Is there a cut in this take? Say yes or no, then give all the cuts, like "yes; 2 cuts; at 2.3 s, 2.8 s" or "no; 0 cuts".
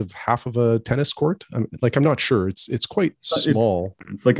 no; 0 cuts